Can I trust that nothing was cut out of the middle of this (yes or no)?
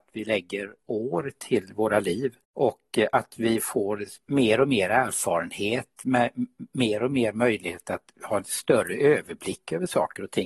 no